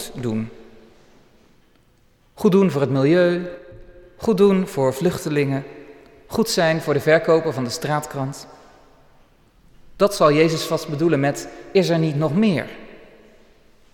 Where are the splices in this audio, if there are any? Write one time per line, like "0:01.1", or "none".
none